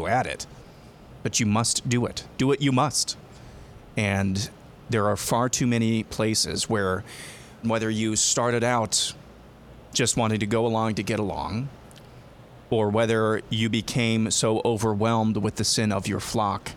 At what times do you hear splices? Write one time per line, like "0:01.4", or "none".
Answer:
0:07.6

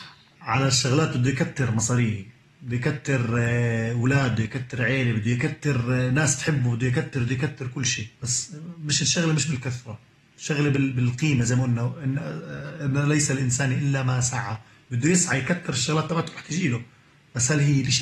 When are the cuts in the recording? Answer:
0:08.1

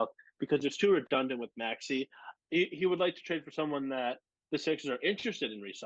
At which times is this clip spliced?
0:02.4

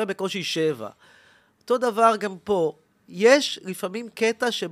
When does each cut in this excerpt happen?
none

